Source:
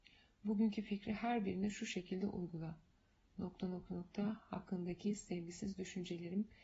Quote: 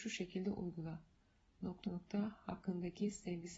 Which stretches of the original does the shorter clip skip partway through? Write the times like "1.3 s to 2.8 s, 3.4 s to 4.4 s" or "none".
3.6 s to 3.9 s